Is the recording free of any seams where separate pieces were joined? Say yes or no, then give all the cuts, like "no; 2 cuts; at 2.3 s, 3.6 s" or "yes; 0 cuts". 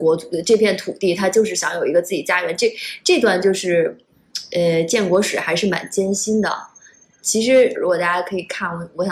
no; 1 cut; at 7.8 s